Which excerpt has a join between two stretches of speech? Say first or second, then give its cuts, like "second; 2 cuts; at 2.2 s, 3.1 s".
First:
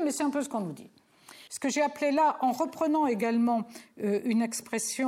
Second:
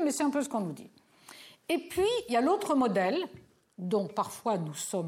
first; 1 cut; at 1.5 s